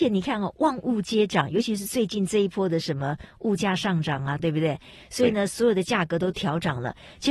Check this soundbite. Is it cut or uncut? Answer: cut